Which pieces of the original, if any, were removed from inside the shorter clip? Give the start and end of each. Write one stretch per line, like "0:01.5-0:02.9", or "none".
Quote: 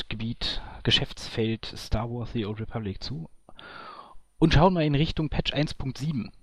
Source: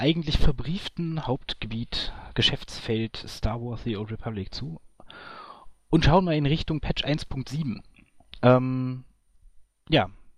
none